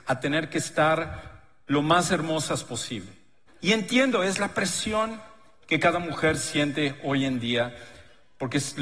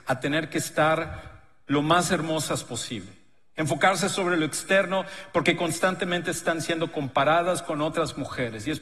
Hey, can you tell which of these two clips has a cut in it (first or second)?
first